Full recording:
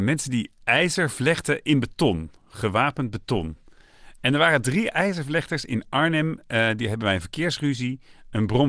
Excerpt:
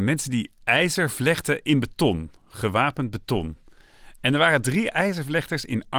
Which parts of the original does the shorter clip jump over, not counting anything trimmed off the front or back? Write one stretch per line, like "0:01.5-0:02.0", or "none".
none